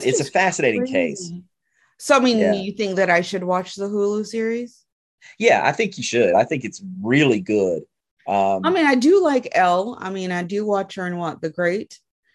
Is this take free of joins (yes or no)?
yes